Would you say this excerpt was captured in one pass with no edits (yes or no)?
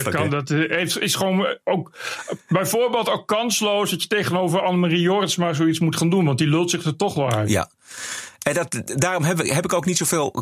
yes